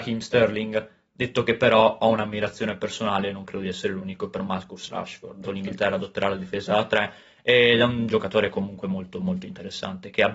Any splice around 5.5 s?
yes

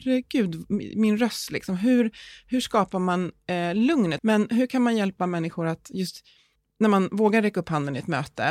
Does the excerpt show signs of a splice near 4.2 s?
yes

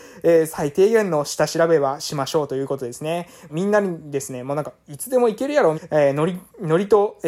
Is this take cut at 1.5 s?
no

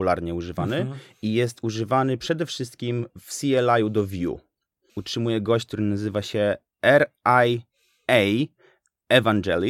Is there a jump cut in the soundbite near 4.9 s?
yes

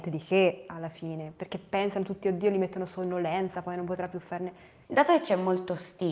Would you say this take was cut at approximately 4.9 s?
yes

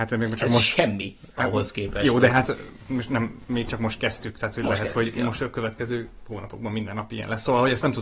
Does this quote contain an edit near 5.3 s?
no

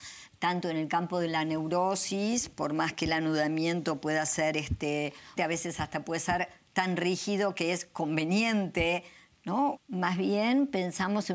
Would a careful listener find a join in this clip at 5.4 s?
yes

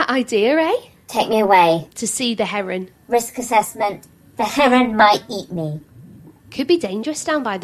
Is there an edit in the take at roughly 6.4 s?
yes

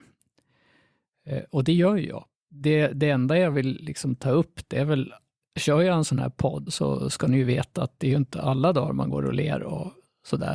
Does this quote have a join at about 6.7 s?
yes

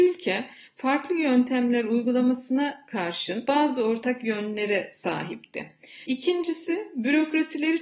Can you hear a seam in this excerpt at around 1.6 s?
no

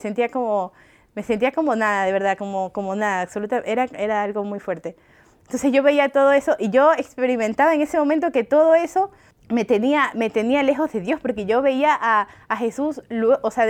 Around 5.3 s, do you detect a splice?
no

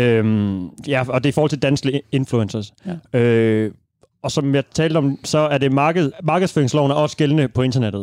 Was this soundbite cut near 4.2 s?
no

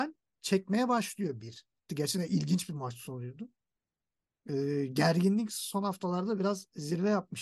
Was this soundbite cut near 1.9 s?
yes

